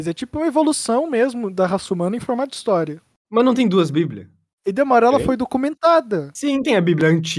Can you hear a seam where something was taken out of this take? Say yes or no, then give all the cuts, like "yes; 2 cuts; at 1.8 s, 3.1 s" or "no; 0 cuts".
no; 0 cuts